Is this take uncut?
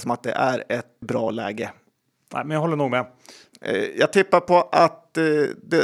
no; 2 cuts; at 1.0 s, 3.5 s

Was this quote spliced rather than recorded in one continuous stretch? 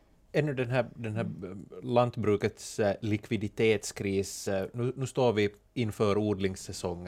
no; 0 cuts

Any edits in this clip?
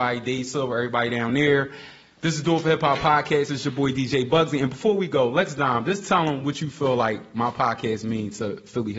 no; 0 cuts

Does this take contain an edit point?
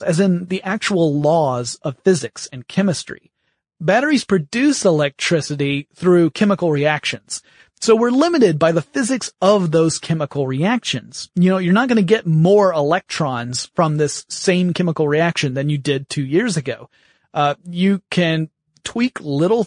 no; 0 cuts

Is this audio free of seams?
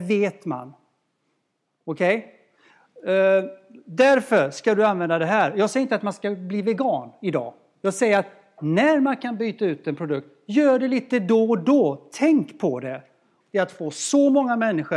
no; 1 cut; at 13.4 s

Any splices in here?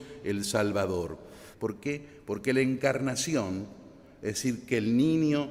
yes; 1 cut; at 1.5 s

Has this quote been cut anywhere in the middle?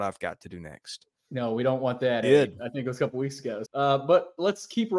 yes; 2 cuts; at 2.2 s, 3.7 s

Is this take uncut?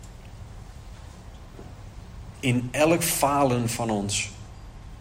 no; 1 cut; at 2.3 s

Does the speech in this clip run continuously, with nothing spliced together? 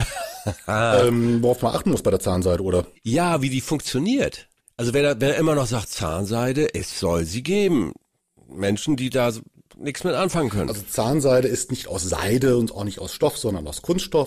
yes; 0 cuts

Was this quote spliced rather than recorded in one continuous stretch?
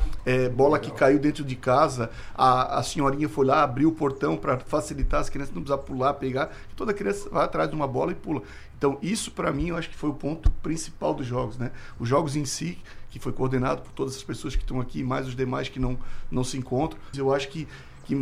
yes; 1 cut; at 17.1 s

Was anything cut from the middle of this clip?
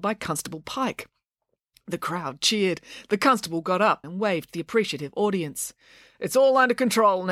yes; 1 cut; at 4.0 s

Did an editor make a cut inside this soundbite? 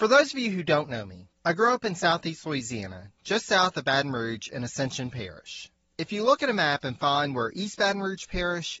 no; 0 cuts

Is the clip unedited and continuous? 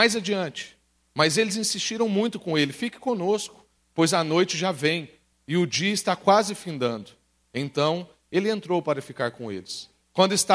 yes; 0 cuts

